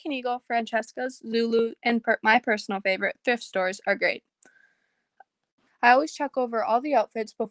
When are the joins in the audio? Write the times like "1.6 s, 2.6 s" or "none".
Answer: 1.8 s, 5.7 s

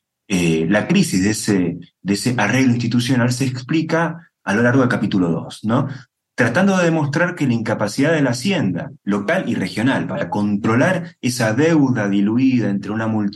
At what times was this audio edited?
4.4 s, 9.0 s

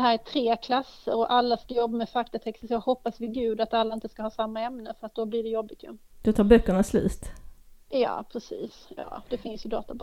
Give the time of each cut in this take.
none

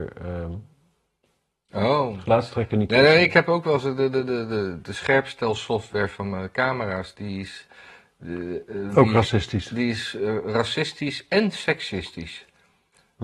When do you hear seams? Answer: none

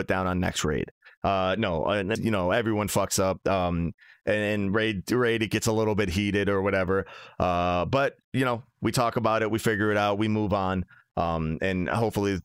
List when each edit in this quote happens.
2.2 s

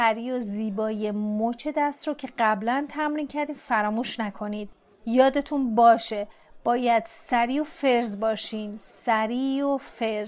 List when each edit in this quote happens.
none

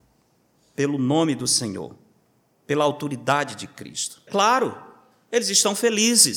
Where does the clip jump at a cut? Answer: 4.3 s

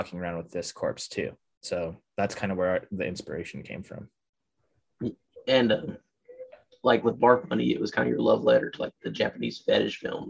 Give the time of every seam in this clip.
none

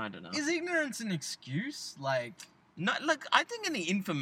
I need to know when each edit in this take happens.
none

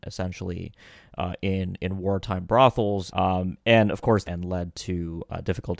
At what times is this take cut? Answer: 3.1 s, 4.2 s

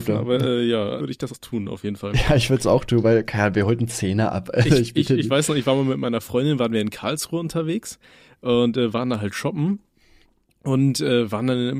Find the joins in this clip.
1.0 s

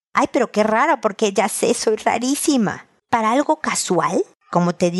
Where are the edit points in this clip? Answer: 3.0 s

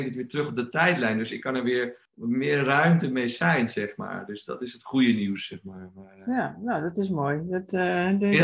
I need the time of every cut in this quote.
2.1 s

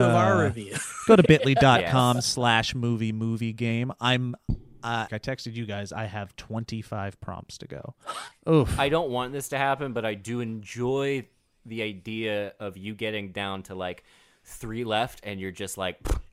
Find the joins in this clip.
5.1 s, 8.3 s

